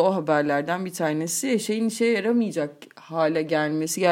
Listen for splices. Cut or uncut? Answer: uncut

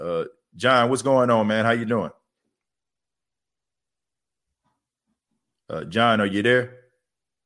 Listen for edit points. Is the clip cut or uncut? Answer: uncut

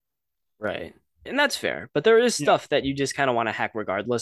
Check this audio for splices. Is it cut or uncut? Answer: cut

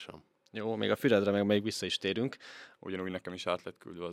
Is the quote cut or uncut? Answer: cut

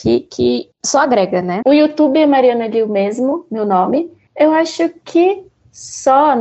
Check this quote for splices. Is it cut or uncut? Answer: cut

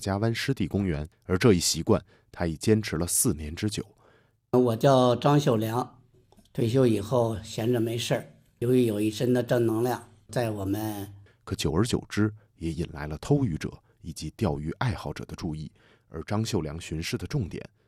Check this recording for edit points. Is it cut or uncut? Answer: cut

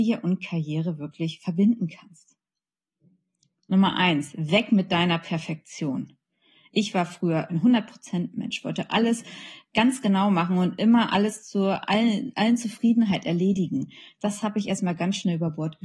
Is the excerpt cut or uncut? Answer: uncut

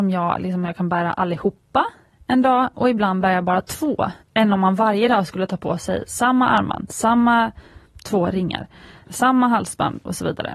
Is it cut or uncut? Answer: cut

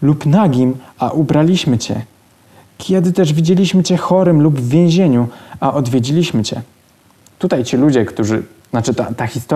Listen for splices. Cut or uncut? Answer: uncut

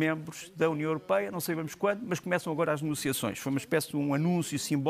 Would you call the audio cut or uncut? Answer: uncut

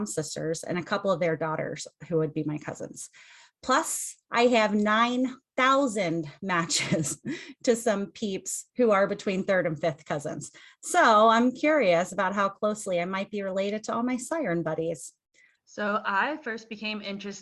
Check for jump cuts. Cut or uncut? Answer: cut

